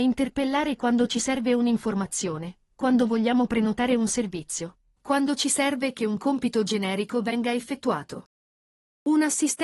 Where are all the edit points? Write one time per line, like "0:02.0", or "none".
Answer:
none